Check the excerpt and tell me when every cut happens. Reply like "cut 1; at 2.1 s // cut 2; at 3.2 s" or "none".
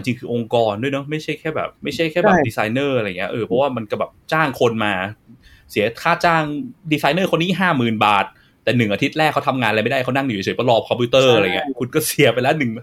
cut 1; at 1.7 s